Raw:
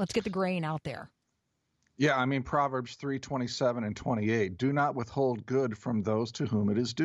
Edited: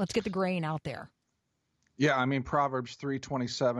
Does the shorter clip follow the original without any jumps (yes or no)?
yes